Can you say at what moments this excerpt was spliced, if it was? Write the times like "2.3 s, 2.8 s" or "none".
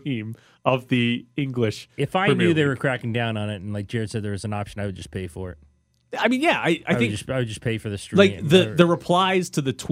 none